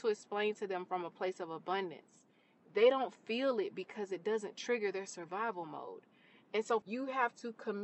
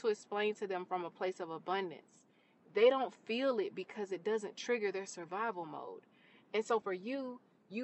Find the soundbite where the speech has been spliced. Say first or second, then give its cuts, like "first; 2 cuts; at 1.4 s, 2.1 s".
first; 1 cut; at 6.8 s